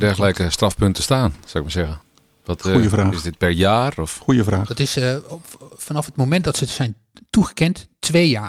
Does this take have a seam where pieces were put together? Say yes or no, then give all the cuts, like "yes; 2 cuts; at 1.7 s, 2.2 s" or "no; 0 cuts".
no; 0 cuts